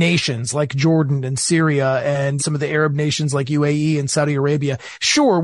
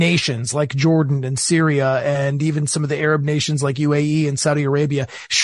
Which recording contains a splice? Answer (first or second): first